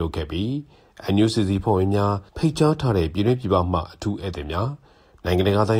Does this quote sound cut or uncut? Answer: cut